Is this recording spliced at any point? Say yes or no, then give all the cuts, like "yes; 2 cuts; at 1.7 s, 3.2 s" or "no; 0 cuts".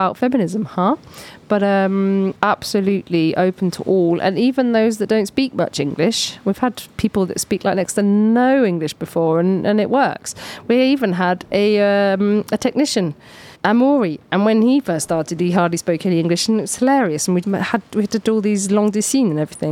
yes; 3 cuts; at 2.3 s, 13.5 s, 17.4 s